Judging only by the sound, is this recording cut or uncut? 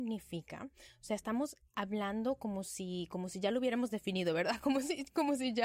uncut